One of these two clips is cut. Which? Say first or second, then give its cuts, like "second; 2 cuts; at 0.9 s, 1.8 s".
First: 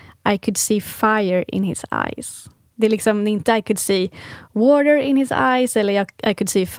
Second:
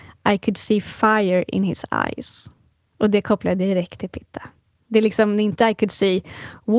first; 1 cut; at 2.7 s